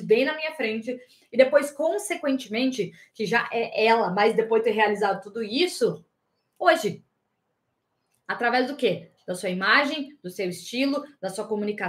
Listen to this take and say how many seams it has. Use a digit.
1